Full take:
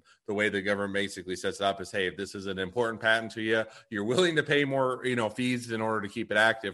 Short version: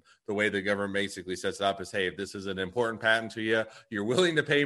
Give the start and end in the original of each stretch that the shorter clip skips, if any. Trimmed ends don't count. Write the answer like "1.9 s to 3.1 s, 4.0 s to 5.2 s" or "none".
none